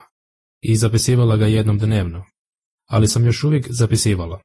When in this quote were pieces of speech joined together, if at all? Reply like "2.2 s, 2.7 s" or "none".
2.8 s